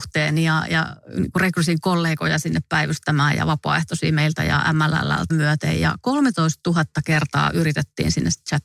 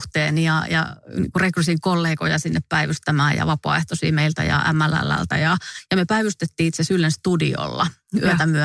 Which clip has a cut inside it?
first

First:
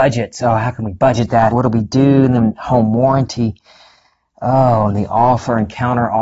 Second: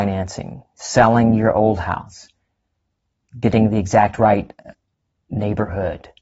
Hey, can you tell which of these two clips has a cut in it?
first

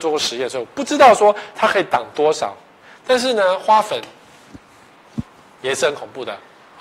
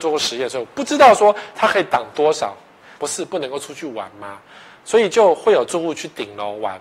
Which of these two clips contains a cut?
second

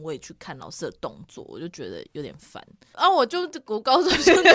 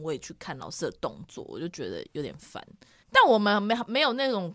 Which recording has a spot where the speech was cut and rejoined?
first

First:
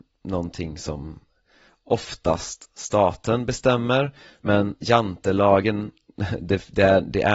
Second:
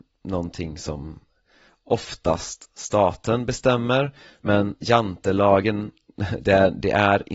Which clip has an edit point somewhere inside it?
second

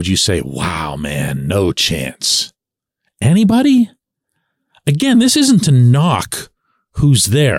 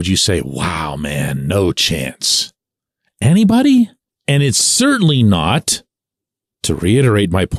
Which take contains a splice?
second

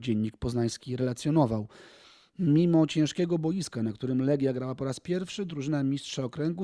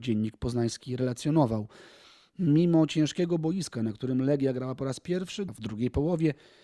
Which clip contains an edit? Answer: second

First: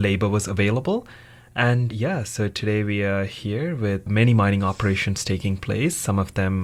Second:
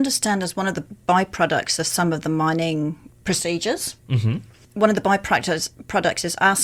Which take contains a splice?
first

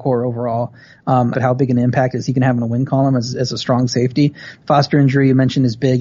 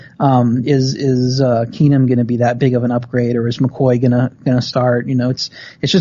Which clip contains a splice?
first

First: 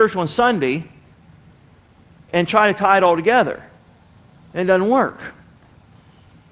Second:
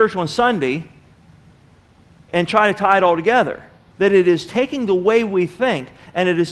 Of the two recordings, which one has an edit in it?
second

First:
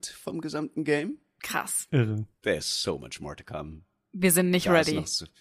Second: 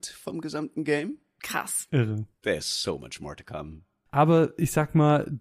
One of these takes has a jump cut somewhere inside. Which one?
second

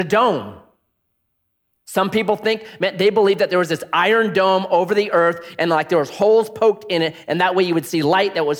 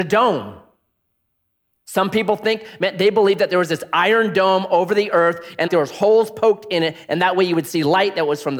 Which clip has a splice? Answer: second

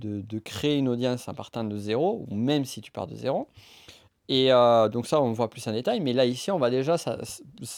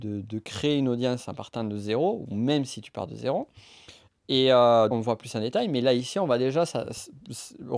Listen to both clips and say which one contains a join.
second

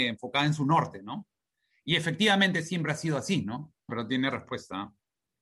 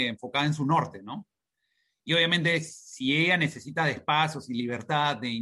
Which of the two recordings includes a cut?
first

